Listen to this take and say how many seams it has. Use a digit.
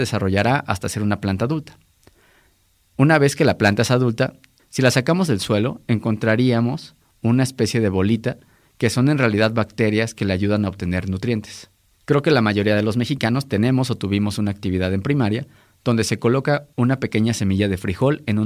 2